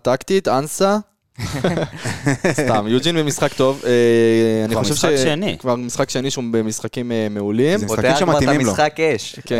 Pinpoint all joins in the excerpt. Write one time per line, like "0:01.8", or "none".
none